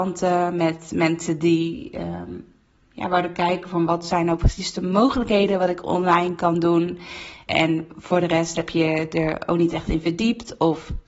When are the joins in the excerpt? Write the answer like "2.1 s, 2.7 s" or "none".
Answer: 7.5 s